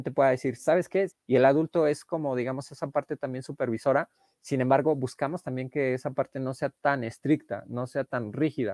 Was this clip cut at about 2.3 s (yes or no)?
no